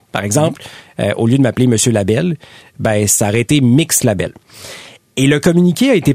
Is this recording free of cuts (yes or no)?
yes